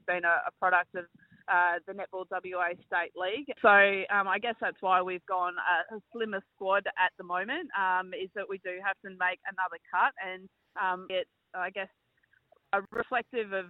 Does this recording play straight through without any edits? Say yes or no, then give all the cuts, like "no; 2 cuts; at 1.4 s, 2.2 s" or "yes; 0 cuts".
no; 2 cuts; at 3.6 s, 11.1 s